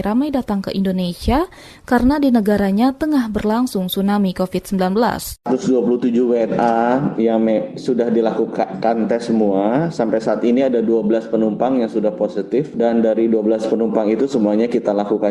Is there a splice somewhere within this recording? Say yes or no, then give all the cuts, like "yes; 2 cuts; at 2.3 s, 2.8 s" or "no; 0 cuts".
no; 0 cuts